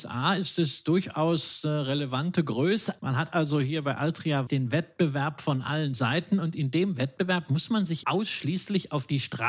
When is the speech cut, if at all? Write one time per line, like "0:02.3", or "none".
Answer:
0:03.0
0:04.5
0:08.0